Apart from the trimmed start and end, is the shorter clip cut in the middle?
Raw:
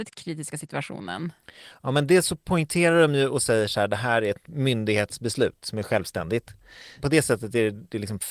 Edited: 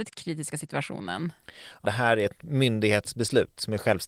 yes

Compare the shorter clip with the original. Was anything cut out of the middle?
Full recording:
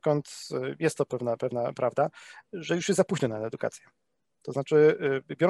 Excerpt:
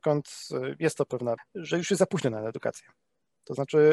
yes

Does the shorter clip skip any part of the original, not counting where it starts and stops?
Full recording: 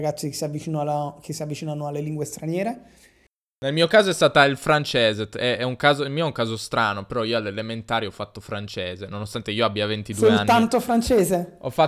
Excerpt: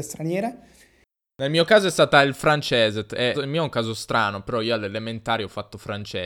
yes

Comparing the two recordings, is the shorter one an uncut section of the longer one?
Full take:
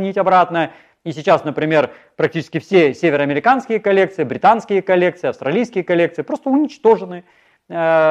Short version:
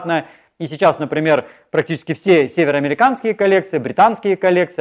yes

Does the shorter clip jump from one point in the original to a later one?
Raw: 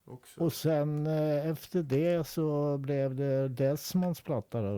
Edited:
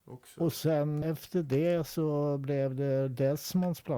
yes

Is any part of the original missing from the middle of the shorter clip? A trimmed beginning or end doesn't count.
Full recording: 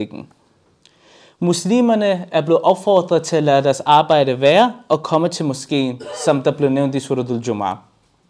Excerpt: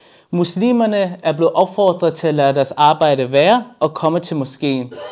no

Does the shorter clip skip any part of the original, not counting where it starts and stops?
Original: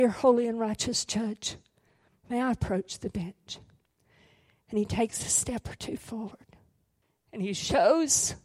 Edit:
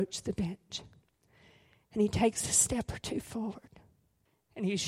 no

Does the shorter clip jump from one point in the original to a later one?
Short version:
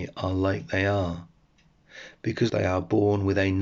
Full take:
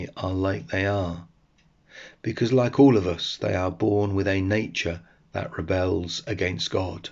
yes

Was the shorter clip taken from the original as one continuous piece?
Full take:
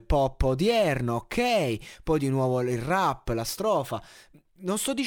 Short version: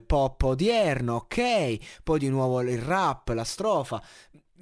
yes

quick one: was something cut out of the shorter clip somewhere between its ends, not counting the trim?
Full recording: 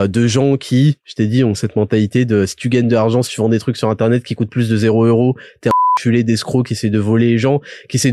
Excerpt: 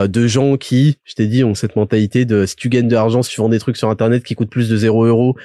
no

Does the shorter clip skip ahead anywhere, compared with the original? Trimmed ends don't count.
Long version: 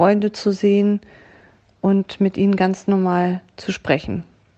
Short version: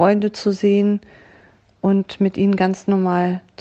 no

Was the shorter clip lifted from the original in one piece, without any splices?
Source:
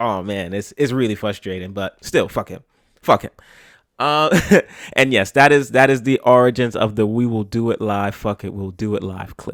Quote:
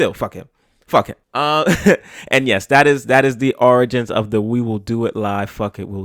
no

